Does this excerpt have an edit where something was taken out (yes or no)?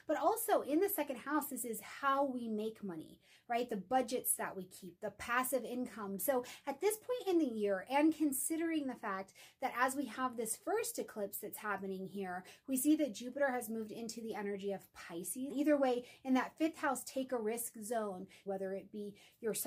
yes